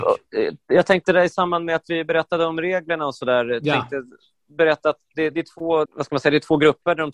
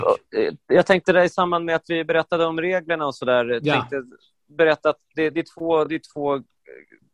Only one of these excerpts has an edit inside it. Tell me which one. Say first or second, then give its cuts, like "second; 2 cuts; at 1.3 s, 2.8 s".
first; 1 cut; at 5.9 s